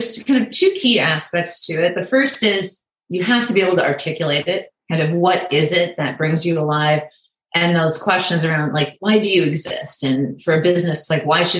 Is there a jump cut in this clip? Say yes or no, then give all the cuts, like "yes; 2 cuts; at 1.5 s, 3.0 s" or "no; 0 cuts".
no; 0 cuts